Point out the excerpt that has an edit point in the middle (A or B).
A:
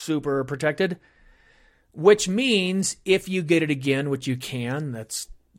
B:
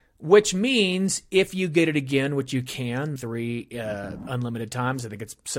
B